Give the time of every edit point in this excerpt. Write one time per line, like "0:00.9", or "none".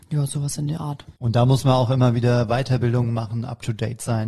0:01.2